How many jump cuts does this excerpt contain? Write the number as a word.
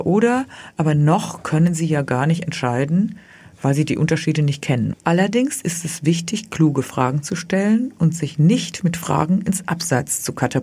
one